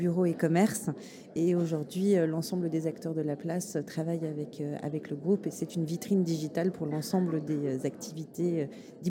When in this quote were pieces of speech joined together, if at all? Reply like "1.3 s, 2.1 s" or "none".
none